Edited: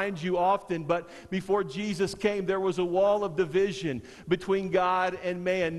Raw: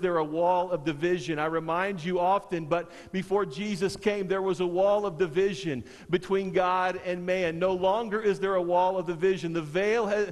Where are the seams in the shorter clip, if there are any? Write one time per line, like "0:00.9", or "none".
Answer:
none